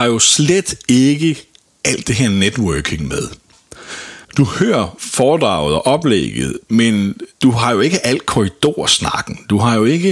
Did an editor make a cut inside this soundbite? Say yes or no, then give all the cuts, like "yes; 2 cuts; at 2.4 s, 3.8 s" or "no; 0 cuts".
yes; 2 cuts; at 4.2 s, 7.3 s